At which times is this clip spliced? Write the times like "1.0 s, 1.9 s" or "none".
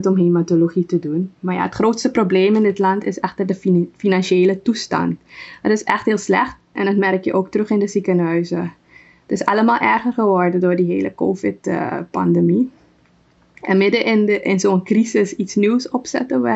none